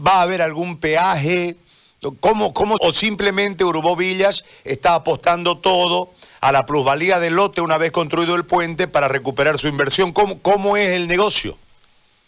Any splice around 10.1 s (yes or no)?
no